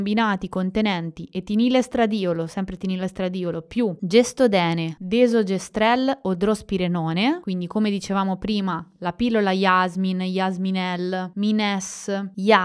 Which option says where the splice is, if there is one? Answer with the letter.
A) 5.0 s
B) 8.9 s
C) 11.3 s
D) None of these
C